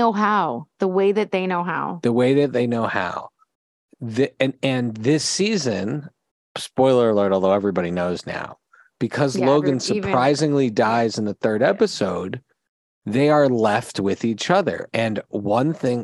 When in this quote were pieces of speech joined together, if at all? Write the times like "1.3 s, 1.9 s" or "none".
none